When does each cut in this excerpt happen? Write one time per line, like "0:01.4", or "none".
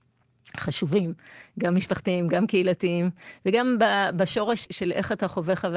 0:04.6